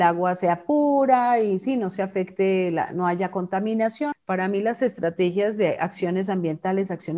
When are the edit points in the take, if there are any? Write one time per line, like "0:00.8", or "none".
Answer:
0:04.1